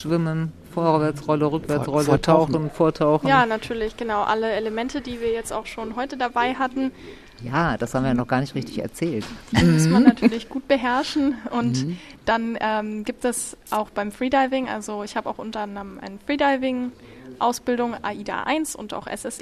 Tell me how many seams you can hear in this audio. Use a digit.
0